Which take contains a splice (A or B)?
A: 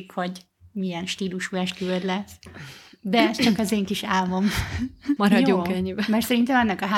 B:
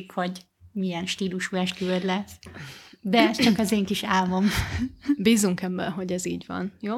A